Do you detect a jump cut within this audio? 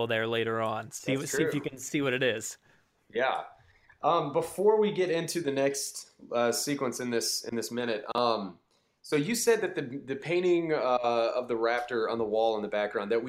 no; 0 cuts

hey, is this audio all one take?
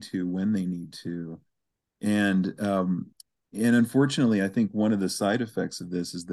yes; 0 cuts

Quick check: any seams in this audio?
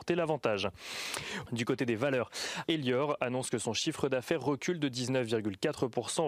yes; 2 cuts; at 1.5 s, 2.6 s

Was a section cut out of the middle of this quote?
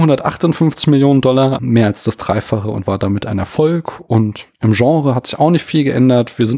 yes; 1 cut; at 1.6 s

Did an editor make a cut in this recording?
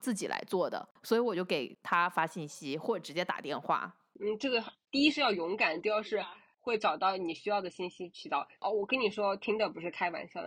no; 0 cuts

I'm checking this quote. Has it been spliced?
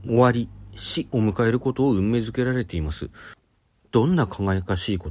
no; 0 cuts

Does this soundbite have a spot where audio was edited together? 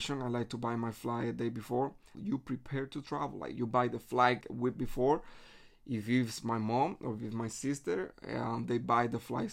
yes; 2 cuts; at 2.1 s, 4.4 s

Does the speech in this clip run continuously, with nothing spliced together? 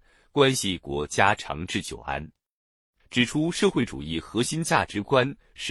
yes; 0 cuts

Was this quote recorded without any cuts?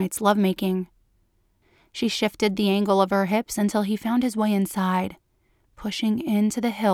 yes; 0 cuts

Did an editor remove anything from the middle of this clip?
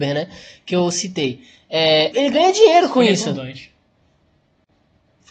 yes; 1 cut; at 2.1 s

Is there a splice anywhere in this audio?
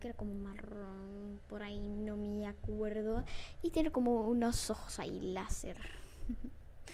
no; 0 cuts

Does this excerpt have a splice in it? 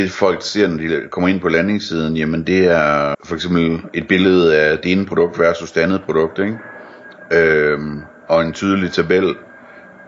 yes; 1 cut; at 3.1 s

